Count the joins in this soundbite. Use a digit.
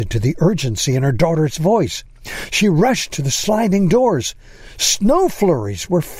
0